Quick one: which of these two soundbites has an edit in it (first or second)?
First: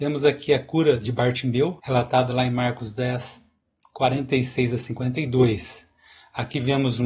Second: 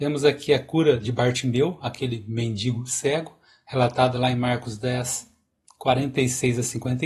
first